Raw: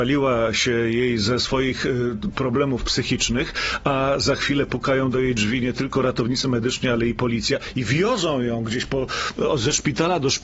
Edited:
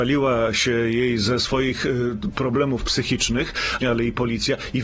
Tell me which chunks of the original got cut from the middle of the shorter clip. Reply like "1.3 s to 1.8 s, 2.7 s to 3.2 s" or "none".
3.8 s to 6.8 s

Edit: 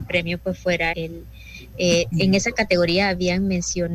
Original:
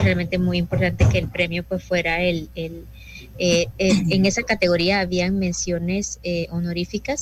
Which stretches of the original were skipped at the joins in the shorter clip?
2.2 s to 2.5 s, 3.7 s to 4.0 s

